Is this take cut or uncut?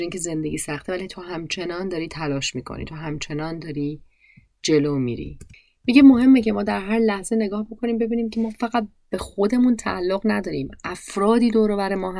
uncut